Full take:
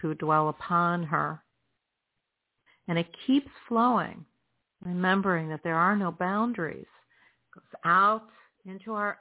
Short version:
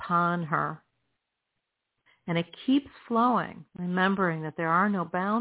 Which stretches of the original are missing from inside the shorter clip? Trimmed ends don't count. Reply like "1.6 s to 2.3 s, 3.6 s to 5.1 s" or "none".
4.3 s to 4.7 s